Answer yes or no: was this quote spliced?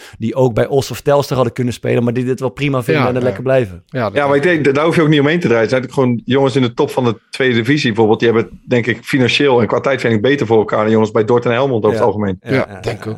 no